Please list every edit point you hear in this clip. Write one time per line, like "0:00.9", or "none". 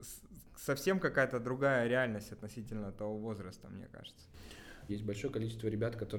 0:04.9